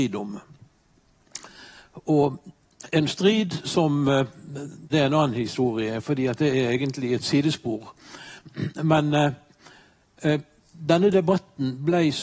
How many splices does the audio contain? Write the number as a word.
one